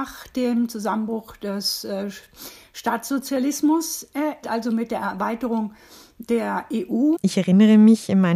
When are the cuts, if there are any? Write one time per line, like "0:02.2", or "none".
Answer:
0:04.4
0:07.2

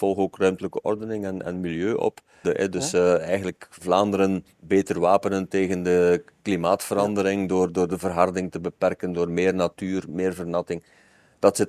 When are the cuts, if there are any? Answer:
0:02.4

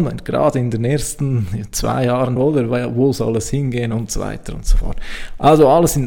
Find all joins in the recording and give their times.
0:02.4

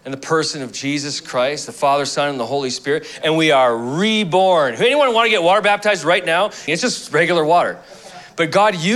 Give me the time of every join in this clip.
0:06.7

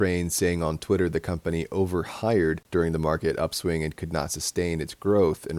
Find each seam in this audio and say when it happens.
none

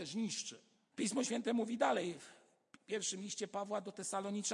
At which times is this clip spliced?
0:00.9

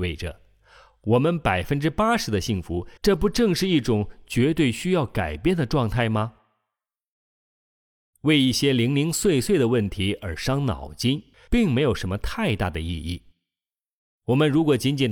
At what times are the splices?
0:03.0
0:11.3

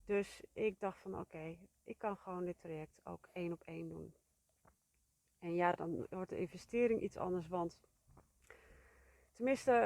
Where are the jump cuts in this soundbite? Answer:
none

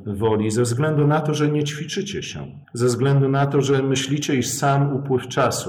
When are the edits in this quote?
0:02.6

